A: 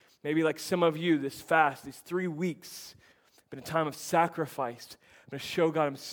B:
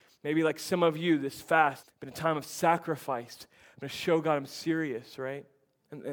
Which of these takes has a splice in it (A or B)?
B